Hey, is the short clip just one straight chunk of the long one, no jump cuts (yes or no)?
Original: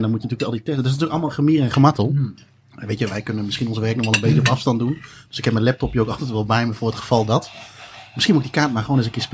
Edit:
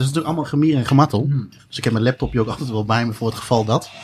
no